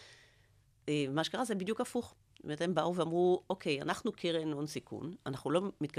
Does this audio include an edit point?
no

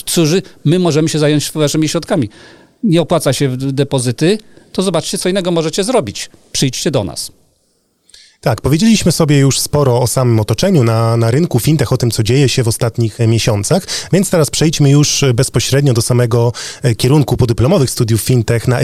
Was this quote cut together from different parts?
no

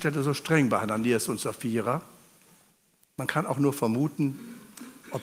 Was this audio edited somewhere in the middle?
yes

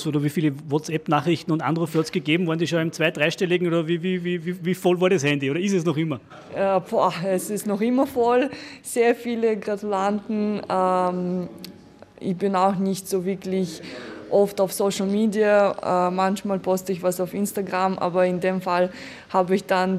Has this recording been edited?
no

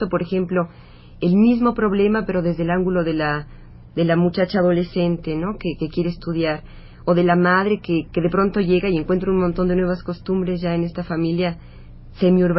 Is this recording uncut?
no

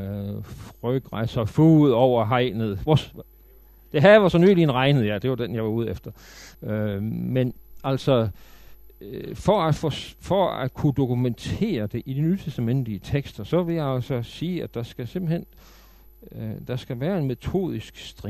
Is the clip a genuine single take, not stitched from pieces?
no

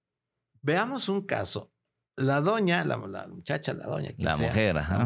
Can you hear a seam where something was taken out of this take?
no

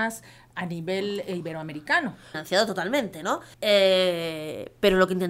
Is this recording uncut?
no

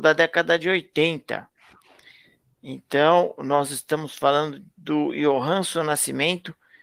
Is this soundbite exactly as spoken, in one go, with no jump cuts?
yes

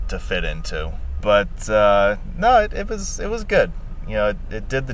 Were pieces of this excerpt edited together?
yes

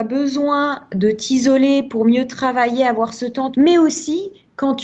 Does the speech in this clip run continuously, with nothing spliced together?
no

